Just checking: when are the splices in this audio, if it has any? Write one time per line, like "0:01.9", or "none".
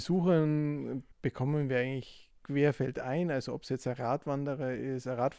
0:01.1